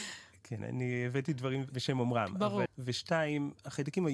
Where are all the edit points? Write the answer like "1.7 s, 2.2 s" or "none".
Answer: 2.7 s